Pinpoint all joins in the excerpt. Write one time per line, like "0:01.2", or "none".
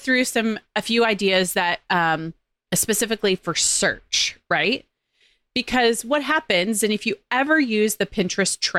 none